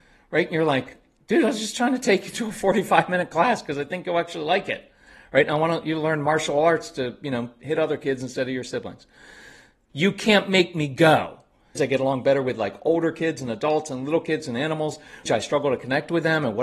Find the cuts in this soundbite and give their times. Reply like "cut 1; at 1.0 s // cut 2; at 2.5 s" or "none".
cut 1; at 9.9 s // cut 2; at 11.8 s // cut 3; at 15.3 s